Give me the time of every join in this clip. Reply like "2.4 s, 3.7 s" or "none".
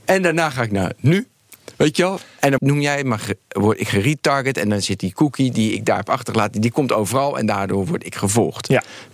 2.6 s